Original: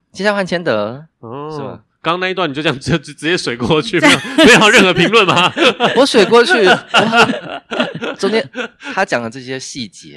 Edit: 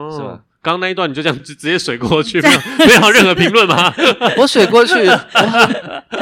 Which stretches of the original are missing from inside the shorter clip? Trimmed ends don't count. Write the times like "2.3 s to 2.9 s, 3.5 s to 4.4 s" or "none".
2.8 s to 3.0 s